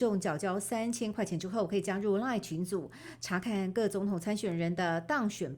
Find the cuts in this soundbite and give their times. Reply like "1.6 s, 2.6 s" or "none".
none

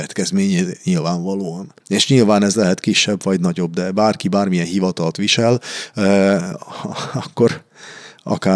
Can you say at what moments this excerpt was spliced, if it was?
1.8 s

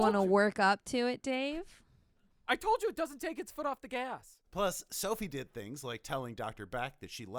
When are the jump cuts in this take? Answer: 4.4 s

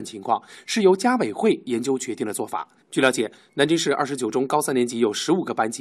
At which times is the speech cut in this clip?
2.8 s

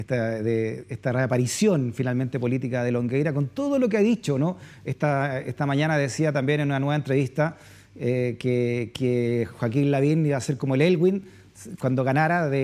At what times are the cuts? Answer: none

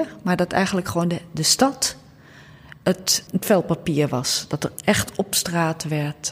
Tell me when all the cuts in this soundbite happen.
3.3 s

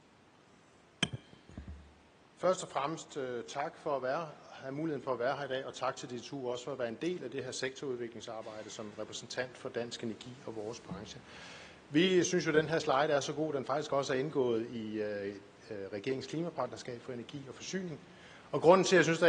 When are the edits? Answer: 2.3 s

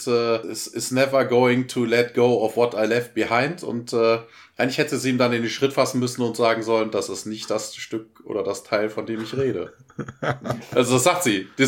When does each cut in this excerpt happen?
none

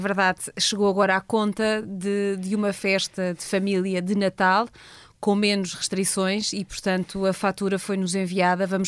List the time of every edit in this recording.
none

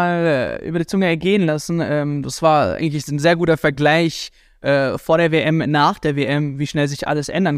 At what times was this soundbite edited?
none

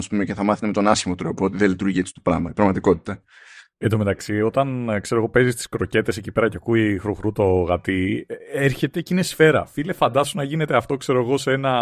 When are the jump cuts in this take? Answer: none

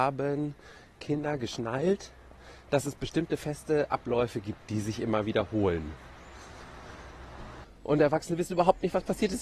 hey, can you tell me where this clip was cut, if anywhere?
7.6 s

